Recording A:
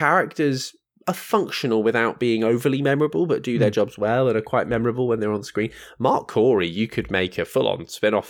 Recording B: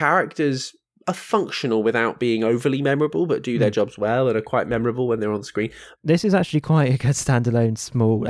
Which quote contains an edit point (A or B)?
B